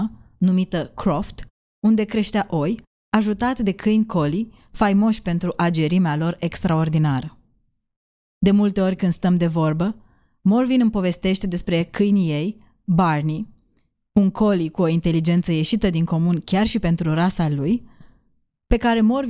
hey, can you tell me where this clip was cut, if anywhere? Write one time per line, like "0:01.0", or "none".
none